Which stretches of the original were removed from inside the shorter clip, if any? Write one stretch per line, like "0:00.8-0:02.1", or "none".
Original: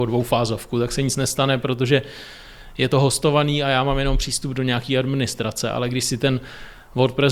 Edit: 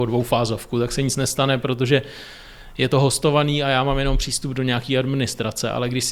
none